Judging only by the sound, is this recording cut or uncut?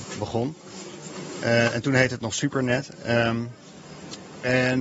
uncut